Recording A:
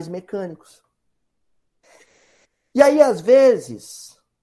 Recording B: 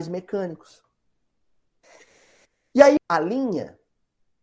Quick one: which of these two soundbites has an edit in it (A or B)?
B